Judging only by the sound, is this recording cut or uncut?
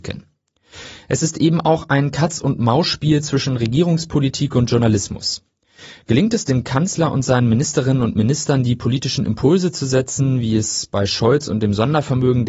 uncut